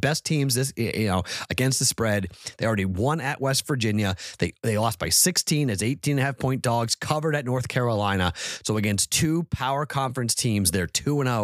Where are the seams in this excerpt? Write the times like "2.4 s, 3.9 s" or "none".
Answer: none